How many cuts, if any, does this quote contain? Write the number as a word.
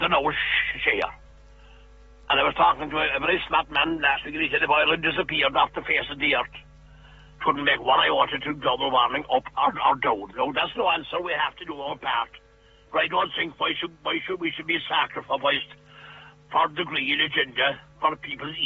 zero